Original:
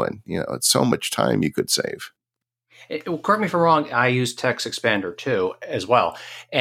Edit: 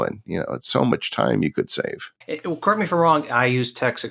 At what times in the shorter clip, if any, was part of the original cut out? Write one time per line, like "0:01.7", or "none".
0:02.2